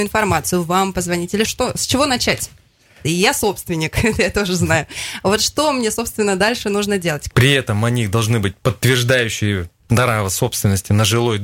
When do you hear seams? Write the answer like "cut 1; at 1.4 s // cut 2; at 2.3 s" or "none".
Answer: cut 1; at 1.5 s // cut 2; at 3.0 s // cut 3; at 7.3 s

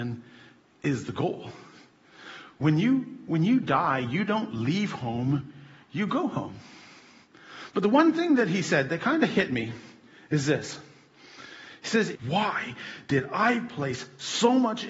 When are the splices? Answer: cut 1; at 12.1 s

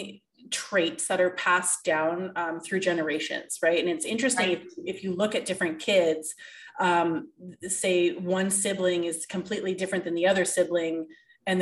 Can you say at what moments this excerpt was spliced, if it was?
none

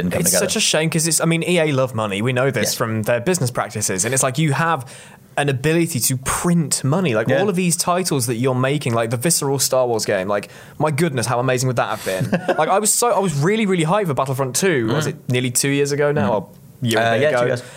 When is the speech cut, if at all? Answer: none

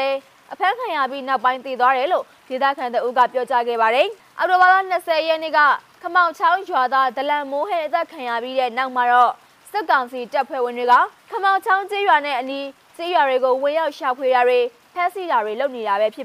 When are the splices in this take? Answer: cut 1; at 11.2 s

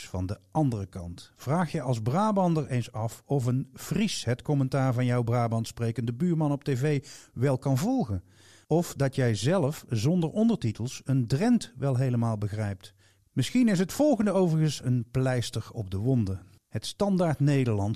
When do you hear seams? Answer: cut 1; at 13.2 s

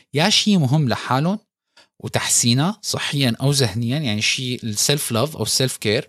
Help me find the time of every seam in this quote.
none

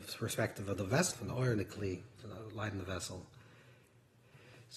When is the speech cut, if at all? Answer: cut 1; at 1.1 s

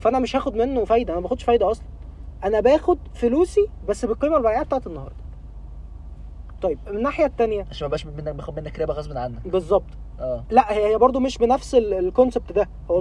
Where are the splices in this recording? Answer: cut 1; at 6.6 s

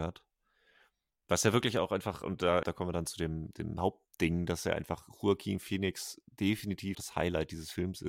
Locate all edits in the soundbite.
cut 1; at 2.6 s // cut 2; at 6.9 s

